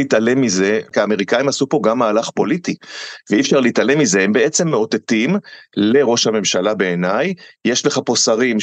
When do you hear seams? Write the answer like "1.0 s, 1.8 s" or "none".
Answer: 0.9 s